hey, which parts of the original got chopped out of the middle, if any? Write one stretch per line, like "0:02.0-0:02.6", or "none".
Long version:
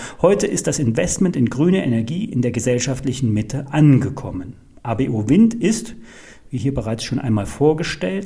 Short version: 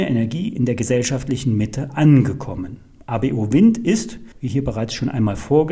0:06.1-0:06.4